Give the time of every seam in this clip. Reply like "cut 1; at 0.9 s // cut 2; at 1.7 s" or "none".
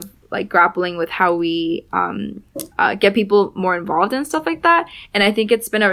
cut 1; at 2.7 s

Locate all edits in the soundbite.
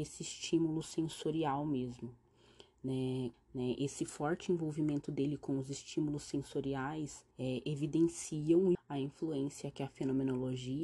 cut 1; at 3.3 s // cut 2; at 7.3 s // cut 3; at 8.7 s

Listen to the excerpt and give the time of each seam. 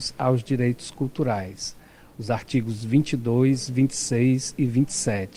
none

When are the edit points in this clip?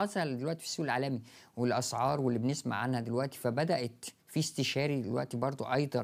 cut 1; at 4.2 s

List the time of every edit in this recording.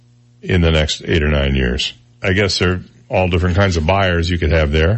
cut 1; at 2.1 s

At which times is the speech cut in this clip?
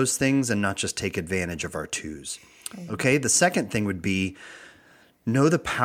none

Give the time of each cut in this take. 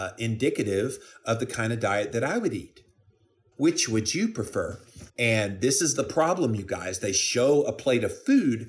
cut 1; at 3.5 s // cut 2; at 5.1 s

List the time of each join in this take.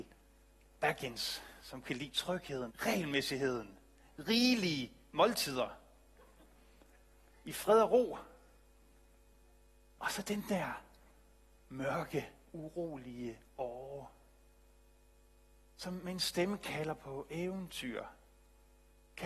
cut 1; at 2.7 s

